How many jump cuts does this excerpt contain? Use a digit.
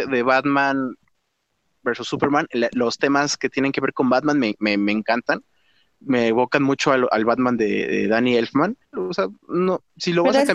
1